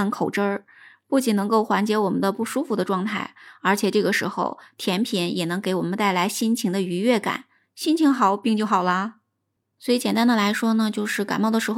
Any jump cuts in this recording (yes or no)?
no